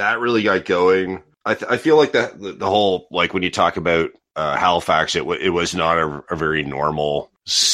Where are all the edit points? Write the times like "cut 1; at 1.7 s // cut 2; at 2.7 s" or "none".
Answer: none